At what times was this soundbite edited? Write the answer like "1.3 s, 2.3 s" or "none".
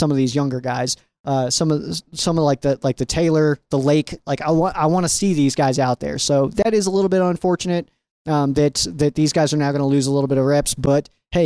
none